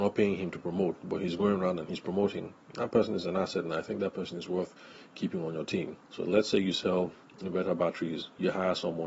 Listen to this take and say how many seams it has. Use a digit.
1